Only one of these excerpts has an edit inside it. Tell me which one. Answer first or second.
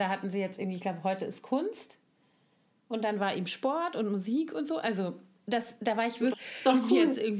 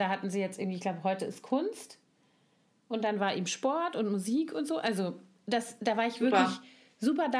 first